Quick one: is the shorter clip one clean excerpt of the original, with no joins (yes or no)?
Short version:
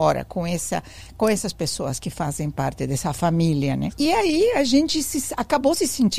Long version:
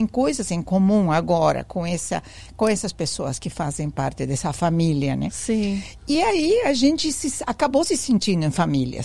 no